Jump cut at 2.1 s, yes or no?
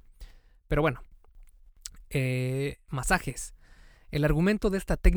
no